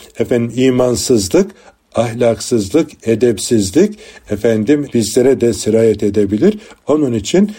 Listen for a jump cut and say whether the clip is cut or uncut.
uncut